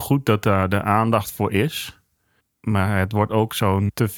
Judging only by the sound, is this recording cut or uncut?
uncut